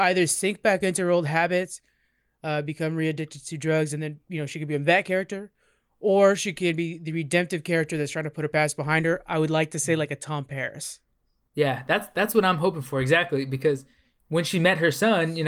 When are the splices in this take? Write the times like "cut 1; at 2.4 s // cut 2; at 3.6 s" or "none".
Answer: none